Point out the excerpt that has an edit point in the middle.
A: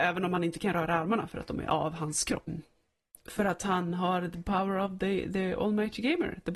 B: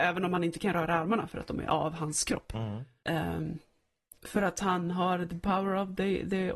A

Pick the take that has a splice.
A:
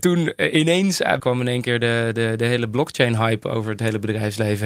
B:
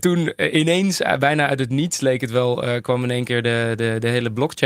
A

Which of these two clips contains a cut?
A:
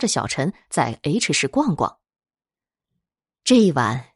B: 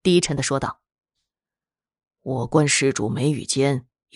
A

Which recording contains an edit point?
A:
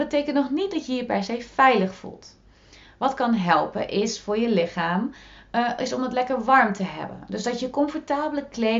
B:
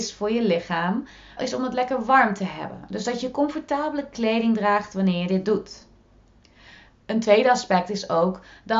B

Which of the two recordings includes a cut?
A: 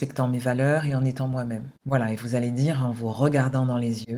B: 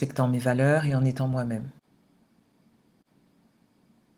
A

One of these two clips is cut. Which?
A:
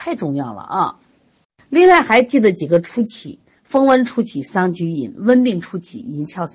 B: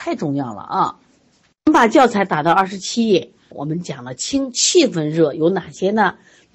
B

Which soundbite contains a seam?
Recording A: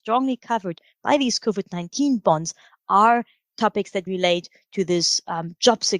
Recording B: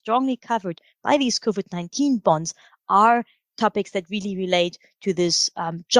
A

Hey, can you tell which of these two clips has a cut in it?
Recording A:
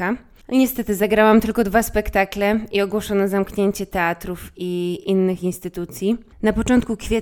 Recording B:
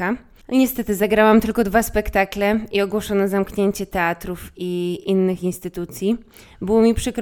A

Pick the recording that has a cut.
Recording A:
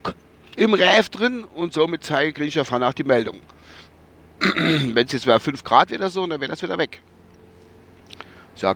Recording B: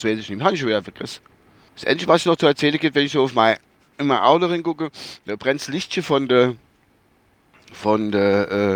B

